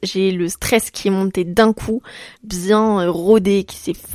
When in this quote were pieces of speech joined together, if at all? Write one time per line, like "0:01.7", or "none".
0:02.4